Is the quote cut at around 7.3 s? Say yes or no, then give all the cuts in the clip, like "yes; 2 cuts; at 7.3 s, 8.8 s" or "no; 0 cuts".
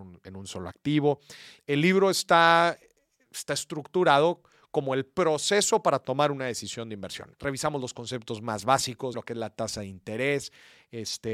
yes; 3 cuts; at 1.6 s, 7.3 s, 9.1 s